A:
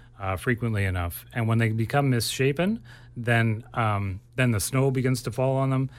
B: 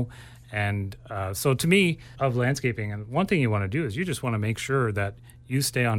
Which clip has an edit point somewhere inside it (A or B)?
B